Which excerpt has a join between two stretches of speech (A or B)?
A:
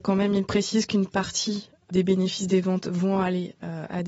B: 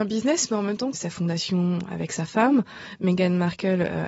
B